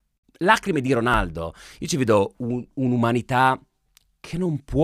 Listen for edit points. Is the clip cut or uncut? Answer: uncut